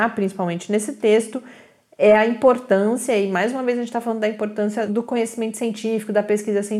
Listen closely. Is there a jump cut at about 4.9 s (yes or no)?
yes